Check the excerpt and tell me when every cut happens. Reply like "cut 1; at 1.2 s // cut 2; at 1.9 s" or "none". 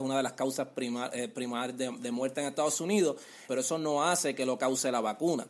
cut 1; at 3.5 s